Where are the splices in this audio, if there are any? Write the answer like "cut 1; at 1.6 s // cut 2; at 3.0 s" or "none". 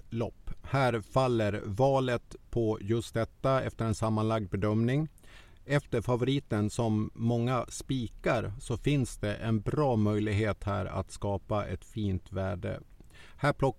none